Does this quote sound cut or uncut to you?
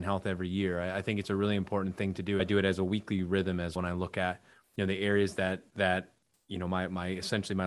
cut